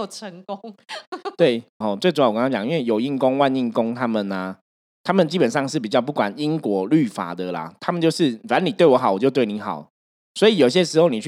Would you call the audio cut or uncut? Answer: cut